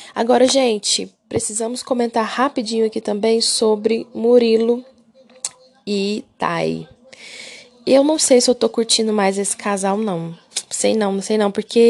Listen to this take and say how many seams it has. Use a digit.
0